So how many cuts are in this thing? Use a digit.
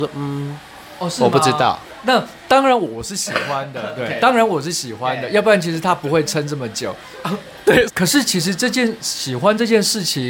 1